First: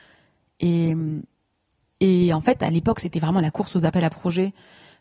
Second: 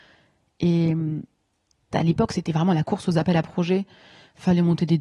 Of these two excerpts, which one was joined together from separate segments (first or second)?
second